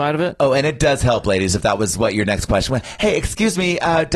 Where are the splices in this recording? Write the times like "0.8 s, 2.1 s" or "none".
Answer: none